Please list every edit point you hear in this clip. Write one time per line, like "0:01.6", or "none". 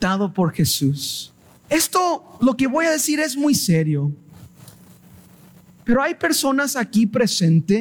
0:01.7